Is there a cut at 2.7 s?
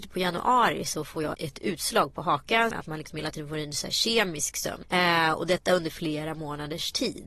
yes; 3 cuts; at 1.3 s, 2.7 s, 4.8 s

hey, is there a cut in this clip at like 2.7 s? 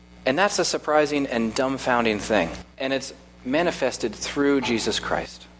yes; 1 cut; at 2.7 s

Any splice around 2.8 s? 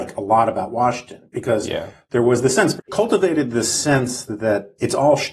yes; 1 cut; at 2.8 s

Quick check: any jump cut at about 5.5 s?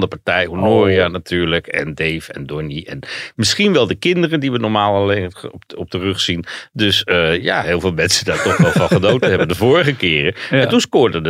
no; 1 cut; at 7.6 s

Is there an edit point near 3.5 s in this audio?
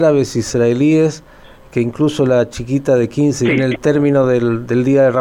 yes; 1 cut; at 3.5 s

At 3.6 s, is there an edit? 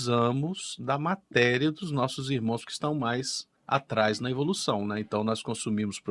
yes; 1 cut; at 3.6 s

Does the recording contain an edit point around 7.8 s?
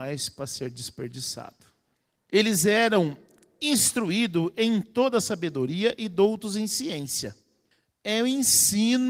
no; 0 cuts

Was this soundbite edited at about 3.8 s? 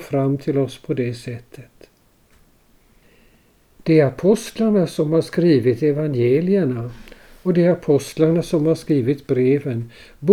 yes; 1 cut; at 3.8 s

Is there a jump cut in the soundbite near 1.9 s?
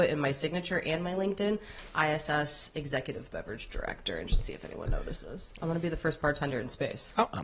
no; 1 cut; at 5.5 s

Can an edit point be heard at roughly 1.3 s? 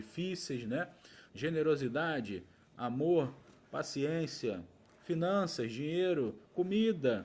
yes; 1 cut; at 1.3 s

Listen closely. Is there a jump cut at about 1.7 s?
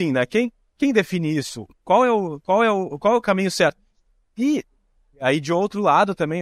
yes; 1 cut; at 1.7 s

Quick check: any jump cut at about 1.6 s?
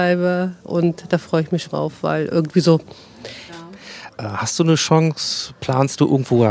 yes; 2 cuts; at 1.6 s, 3.5 s

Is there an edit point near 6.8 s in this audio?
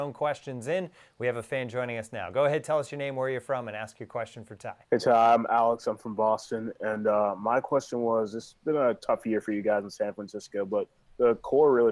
no; 1 cut; at 4.8 s

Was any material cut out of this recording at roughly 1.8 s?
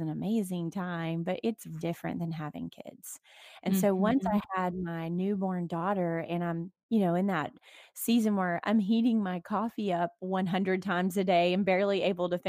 yes; 1 cut; at 1.8 s

